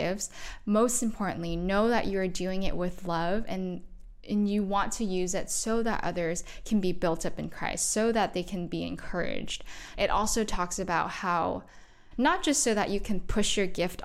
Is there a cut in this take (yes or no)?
yes